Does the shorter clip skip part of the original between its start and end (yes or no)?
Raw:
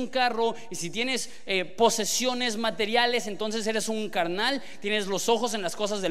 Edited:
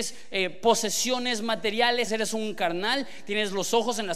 yes